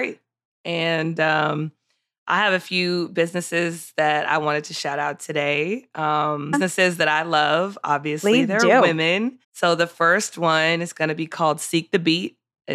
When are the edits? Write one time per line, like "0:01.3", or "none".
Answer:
0:06.5
0:09.4